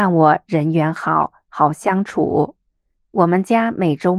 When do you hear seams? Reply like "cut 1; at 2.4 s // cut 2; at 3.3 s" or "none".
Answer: cut 1; at 3.0 s